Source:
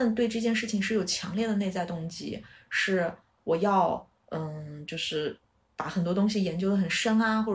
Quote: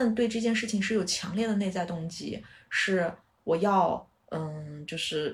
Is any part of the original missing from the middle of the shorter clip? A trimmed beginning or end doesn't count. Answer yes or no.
no